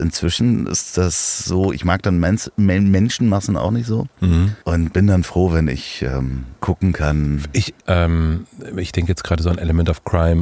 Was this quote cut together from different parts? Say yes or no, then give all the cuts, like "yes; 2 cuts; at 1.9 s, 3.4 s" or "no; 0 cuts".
yes; 3 cuts; at 4.6 s, 6.6 s, 7.8 s